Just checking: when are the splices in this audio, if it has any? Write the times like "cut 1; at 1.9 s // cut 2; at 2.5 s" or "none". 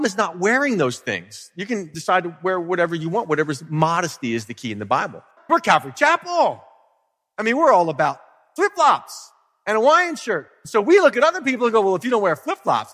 cut 1; at 5.4 s